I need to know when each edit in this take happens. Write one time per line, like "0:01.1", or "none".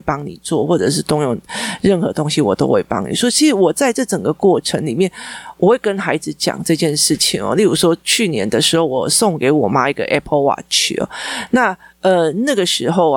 none